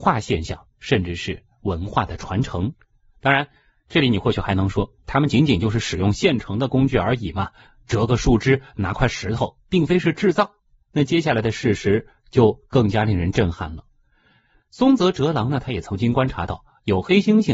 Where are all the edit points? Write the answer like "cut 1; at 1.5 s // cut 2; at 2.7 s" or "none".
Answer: none